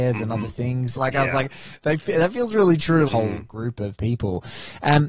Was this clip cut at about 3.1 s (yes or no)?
yes